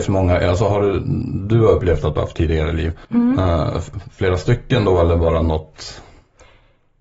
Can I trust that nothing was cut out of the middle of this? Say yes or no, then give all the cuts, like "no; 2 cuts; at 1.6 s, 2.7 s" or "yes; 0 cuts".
no; 1 cut; at 3.0 s